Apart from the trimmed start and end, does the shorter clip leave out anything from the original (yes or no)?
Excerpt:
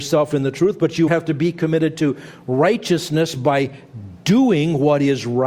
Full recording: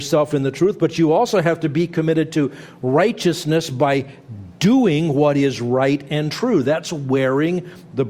yes